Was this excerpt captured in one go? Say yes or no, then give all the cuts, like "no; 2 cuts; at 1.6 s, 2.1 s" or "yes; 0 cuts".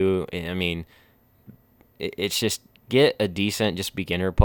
yes; 0 cuts